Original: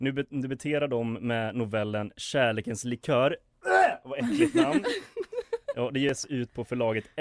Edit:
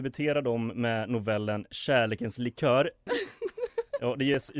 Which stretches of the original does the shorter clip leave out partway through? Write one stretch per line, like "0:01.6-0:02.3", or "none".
0:03.5-0:04.8